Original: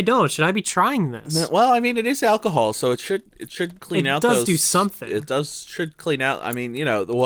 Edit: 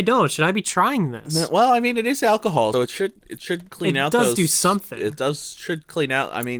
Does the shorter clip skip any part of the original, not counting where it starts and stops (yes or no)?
yes